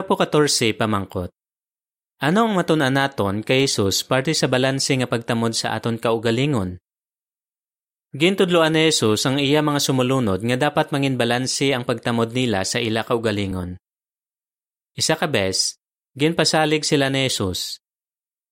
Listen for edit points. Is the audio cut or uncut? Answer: uncut